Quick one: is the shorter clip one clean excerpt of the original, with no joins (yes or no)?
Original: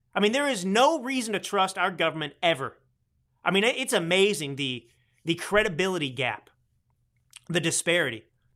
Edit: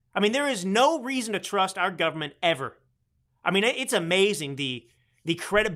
yes